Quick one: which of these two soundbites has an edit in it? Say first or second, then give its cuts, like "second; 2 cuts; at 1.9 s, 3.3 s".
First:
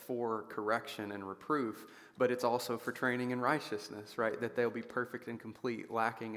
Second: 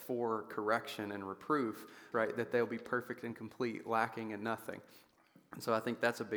second; 1 cut; at 2.1 s